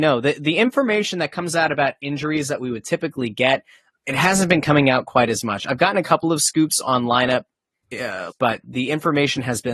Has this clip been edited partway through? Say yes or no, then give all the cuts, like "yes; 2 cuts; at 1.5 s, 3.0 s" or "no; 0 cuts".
yes; 2 cuts; at 4.0 s, 8.3 s